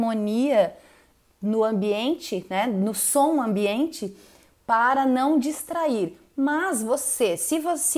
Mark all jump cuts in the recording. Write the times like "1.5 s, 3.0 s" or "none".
none